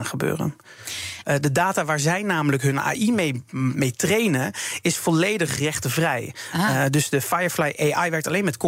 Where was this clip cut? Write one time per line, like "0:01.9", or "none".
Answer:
0:01.2